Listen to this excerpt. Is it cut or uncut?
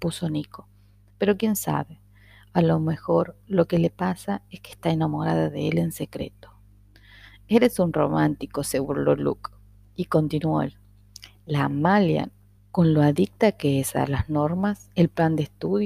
cut